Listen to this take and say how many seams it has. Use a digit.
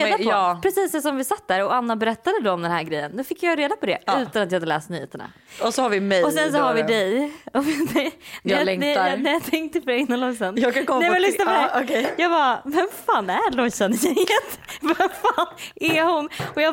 0